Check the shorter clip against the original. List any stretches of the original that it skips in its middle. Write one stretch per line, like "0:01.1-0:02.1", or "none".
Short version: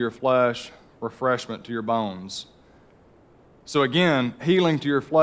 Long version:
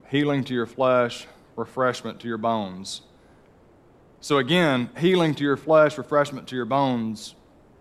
none